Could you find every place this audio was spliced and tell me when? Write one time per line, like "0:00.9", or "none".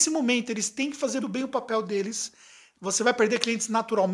0:01.2
0:02.7